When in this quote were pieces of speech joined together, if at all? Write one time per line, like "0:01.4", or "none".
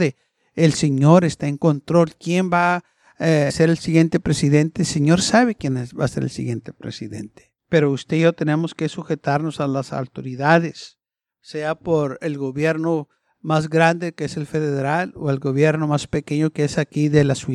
0:03.5
0:07.6